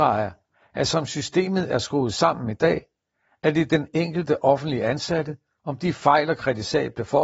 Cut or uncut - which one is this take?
cut